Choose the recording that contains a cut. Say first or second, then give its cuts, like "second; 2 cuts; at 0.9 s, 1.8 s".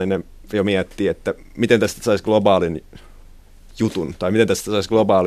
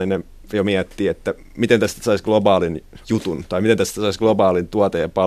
second; 1 cut; at 3.0 s